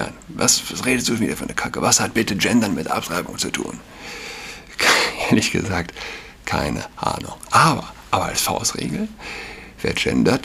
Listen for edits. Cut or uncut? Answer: uncut